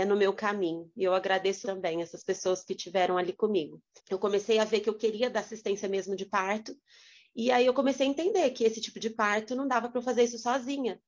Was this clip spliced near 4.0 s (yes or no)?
yes